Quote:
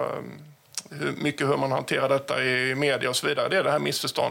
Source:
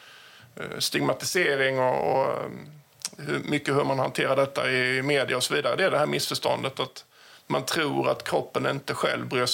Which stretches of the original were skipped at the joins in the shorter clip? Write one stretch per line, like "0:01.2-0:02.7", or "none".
none